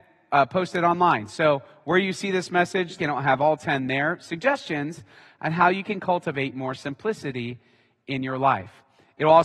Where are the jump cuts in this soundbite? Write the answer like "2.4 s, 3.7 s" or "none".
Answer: 3.0 s